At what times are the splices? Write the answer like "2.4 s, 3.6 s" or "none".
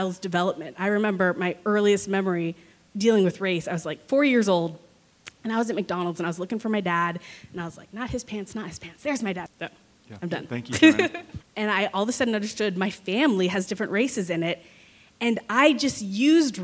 9.5 s, 11.4 s